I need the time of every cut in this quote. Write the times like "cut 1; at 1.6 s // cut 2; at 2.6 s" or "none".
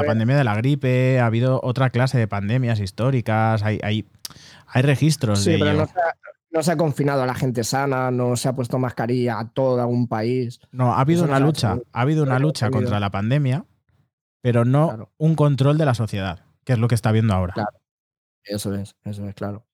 none